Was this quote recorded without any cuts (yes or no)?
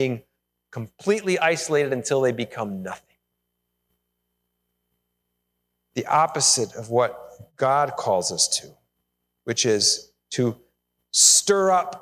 yes